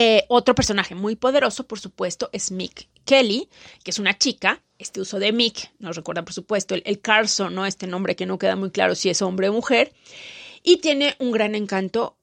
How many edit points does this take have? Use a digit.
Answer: 0